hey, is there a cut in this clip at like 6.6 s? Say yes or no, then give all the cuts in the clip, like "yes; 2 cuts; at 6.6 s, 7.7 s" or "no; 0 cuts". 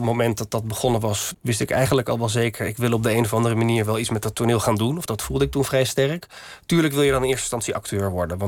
no; 2 cuts; at 1.3 s, 5.1 s